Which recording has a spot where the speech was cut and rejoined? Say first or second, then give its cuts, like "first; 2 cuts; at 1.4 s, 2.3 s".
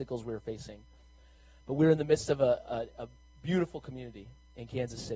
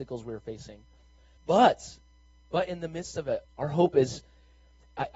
second; 2 cuts; at 1.4 s, 3.4 s